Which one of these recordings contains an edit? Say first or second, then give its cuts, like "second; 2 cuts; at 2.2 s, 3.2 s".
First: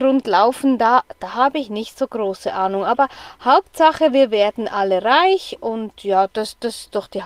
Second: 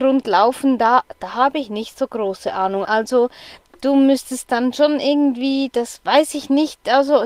second; 1 cut; at 2.8 s